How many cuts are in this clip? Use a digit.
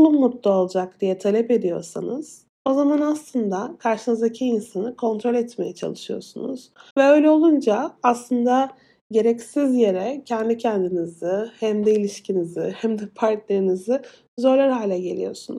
1